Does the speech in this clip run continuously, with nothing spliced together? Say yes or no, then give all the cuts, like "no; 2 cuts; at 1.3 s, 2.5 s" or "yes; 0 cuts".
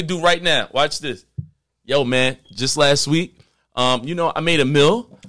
yes; 0 cuts